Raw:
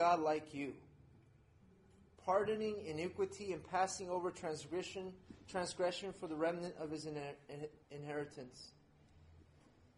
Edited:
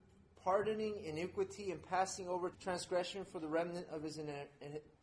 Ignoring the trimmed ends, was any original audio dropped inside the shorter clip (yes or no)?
yes